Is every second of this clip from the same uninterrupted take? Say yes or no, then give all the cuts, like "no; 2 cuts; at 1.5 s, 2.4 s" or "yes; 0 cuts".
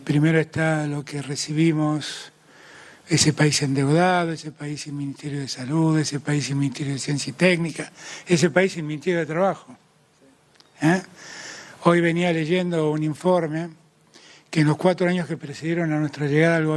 yes; 0 cuts